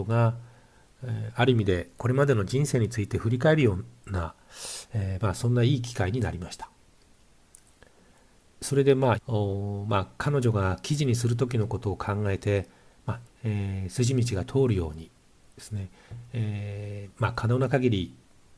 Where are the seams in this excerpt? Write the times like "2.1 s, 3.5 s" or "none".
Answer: 9.2 s, 13.2 s